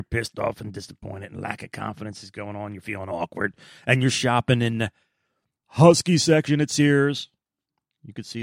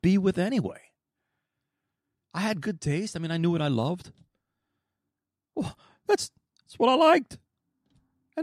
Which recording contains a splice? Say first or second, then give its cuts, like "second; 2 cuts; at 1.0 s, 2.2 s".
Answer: second; 1 cut; at 5.5 s